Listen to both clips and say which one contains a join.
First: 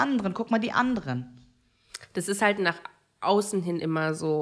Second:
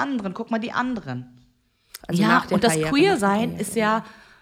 second; 1 cut; at 2.0 s

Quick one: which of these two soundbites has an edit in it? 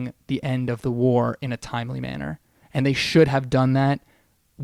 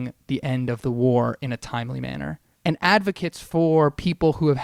second; 1 cut; at 2.5 s

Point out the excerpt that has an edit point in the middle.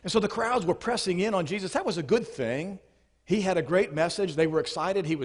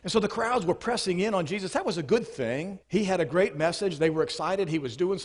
second; 1 cut; at 2.8 s

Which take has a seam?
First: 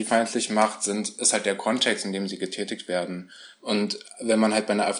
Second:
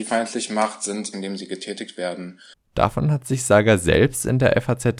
second; 2 cuts; at 1.1 s, 2.5 s

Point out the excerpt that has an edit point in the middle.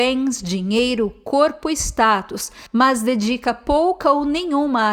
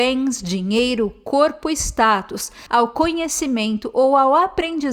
second; 1 cut; at 2.7 s

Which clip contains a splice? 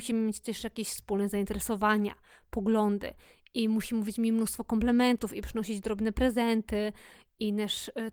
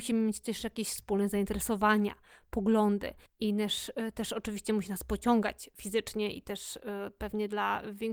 second; 1 cut; at 3.3 s

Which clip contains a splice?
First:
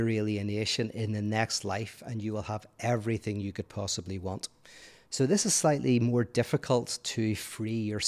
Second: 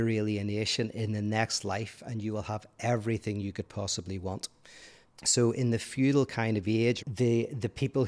second; 2 cuts; at 5.0 s, 7.0 s

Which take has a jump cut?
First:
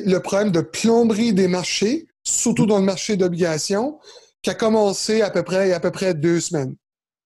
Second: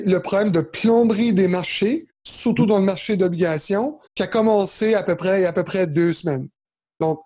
second; 1 cut; at 4.1 s

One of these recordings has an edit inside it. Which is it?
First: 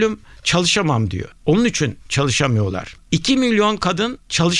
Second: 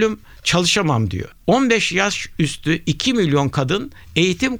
first; 1 cut; at 1.4 s

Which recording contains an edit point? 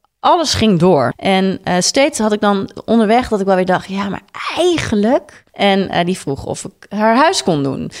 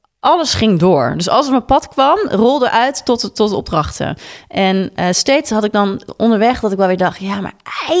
first; 2 cuts; at 1.1 s, 5.5 s

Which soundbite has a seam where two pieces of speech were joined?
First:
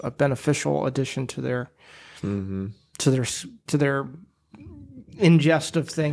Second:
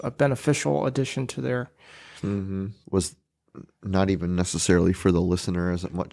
second; 1 cut; at 2.8 s

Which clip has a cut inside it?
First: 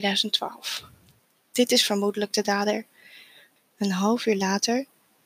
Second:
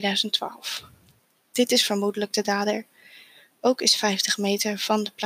first; 1 cut; at 3.6 s

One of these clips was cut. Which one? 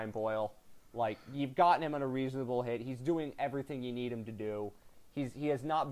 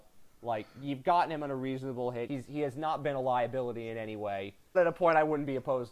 second; 2 cuts; at 2.3 s, 4.7 s

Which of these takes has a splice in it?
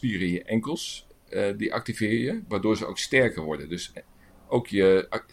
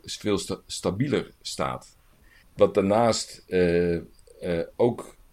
second; 1 cut; at 2.4 s

